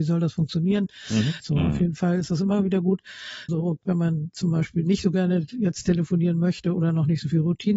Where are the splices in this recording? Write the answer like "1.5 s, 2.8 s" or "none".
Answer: 1.4 s, 3.5 s